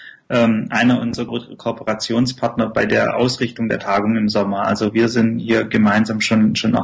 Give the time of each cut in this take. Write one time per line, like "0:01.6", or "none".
0:01.3